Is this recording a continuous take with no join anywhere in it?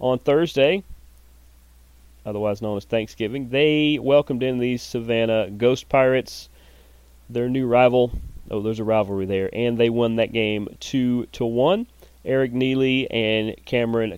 yes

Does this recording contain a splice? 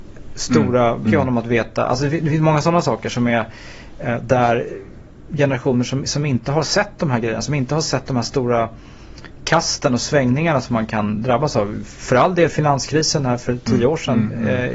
yes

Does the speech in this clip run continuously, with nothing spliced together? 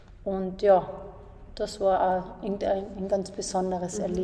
yes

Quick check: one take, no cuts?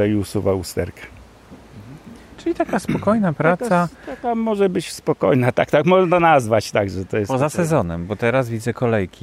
yes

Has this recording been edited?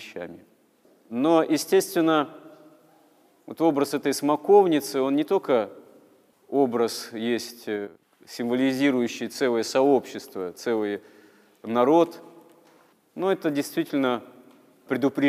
no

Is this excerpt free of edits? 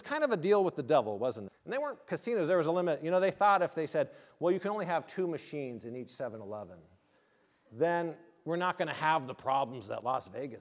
no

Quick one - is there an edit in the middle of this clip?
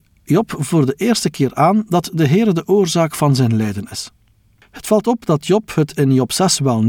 no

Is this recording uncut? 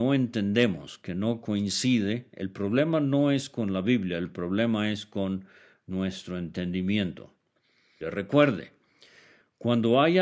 no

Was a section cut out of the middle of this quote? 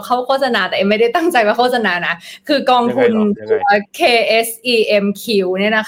yes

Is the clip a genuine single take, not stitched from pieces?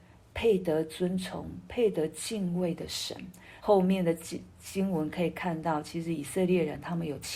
no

